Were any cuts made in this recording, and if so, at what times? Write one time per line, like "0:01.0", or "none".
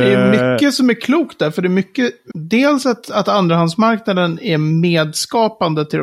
0:02.3